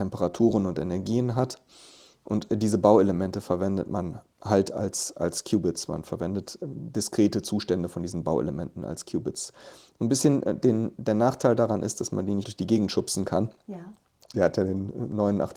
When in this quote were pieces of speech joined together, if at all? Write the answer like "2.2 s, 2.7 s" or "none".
12.4 s, 14.3 s

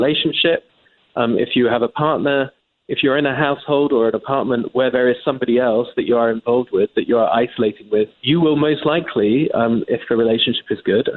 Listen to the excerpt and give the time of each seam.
8.1 s

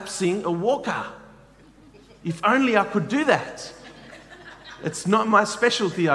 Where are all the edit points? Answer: none

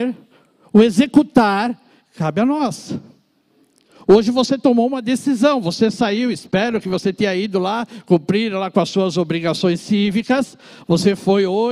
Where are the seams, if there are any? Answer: none

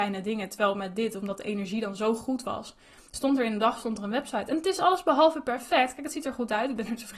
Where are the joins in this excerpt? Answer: none

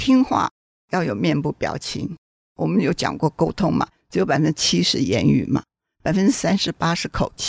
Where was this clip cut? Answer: none

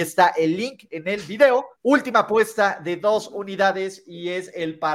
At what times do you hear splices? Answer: 1.7 s

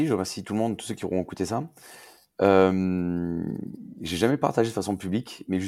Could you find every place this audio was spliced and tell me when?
none

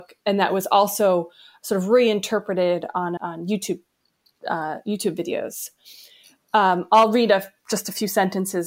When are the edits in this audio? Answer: 3.2 s

